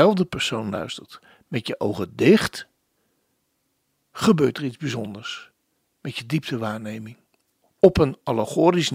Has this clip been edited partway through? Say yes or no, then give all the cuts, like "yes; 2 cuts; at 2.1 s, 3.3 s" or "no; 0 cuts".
yes; 1 cut; at 7.6 s